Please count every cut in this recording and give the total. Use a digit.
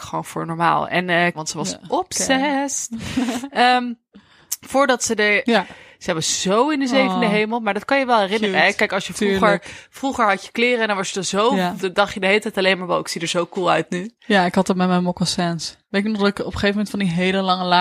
3